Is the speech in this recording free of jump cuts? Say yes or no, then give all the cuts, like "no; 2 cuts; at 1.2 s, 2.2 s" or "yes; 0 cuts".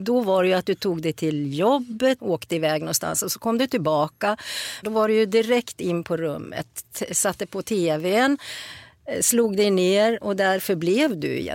no; 2 cuts; at 2.2 s, 4.8 s